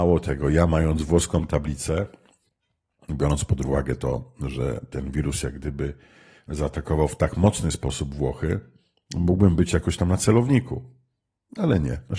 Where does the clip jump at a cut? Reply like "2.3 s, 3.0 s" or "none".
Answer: none